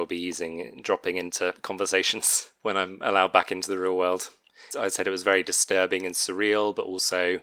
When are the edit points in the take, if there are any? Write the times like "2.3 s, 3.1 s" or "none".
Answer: none